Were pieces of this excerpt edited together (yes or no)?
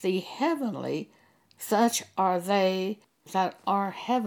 yes